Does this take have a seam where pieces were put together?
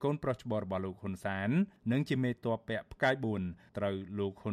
no; 0 cuts

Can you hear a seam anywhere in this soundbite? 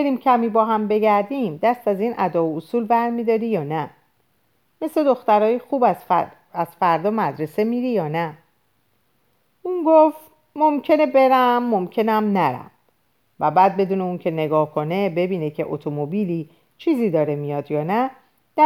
no; 0 cuts

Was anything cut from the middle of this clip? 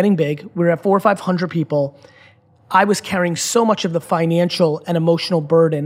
no; 0 cuts

